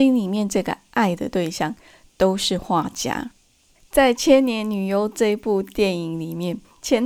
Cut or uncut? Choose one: uncut